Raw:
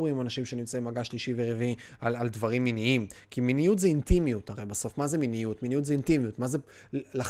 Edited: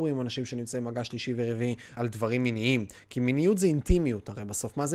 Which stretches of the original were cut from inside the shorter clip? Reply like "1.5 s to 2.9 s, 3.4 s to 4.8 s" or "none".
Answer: 2.0 s to 2.2 s